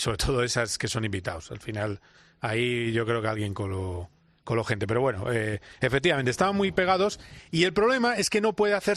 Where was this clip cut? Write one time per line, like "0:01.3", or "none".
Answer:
none